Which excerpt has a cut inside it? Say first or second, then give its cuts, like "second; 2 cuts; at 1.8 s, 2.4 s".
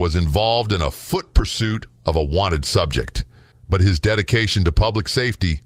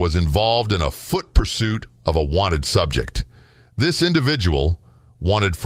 first; 1 cut; at 3.5 s